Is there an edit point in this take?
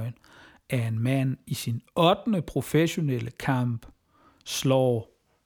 no; 0 cuts

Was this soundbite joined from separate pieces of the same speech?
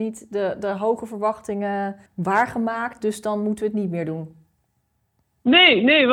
yes; 1 cut; at 2.1 s

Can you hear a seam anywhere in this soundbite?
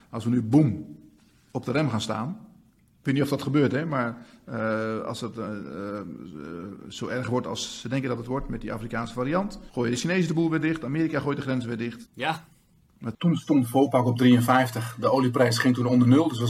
yes; 2 cuts; at 9.7 s, 12.0 s

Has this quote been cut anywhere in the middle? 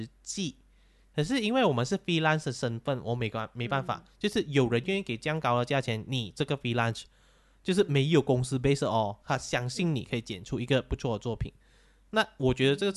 no; 0 cuts

